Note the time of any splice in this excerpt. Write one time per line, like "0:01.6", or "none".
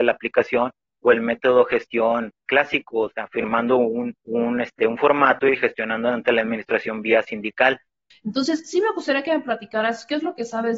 0:04.2
0:08.1